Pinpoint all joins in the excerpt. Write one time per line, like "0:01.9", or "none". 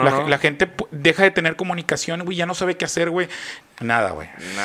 0:03.6